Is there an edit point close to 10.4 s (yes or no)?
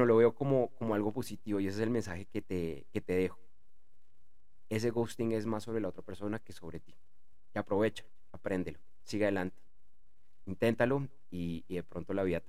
yes